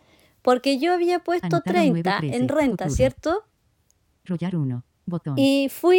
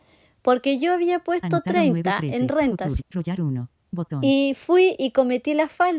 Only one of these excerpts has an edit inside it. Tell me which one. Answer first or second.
second